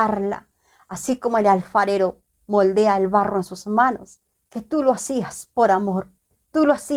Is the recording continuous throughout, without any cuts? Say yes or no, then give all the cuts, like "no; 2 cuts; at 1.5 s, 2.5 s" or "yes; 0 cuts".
no; 1 cut; at 4.4 s